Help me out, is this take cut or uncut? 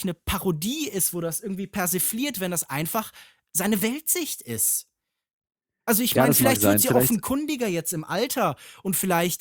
uncut